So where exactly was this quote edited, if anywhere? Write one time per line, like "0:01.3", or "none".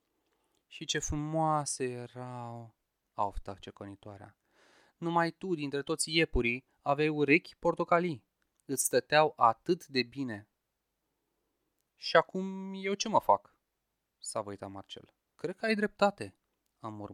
0:15.3